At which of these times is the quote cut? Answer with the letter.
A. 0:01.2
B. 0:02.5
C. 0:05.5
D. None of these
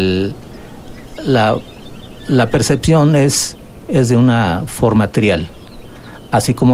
A